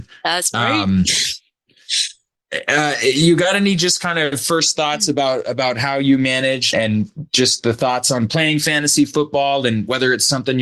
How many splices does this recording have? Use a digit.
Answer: 1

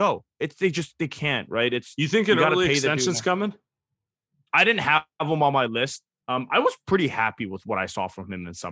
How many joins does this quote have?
1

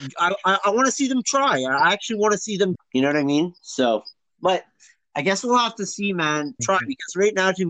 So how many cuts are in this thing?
2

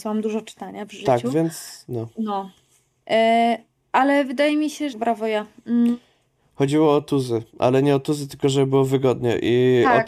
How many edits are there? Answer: 1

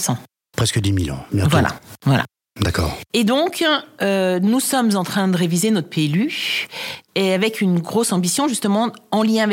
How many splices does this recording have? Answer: 0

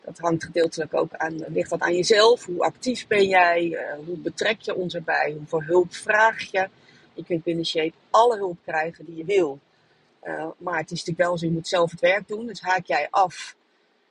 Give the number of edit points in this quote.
1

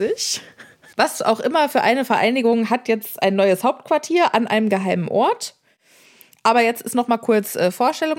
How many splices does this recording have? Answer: 1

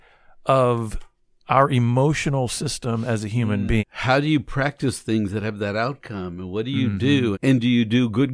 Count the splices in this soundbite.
2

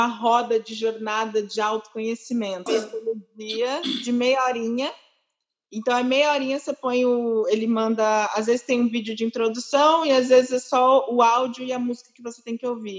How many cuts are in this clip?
1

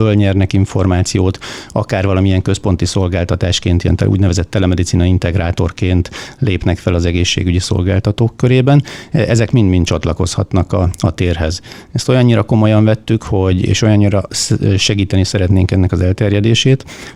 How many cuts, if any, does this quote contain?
0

